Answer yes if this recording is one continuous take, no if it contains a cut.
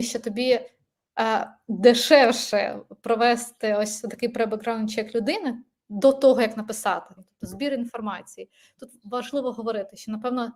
no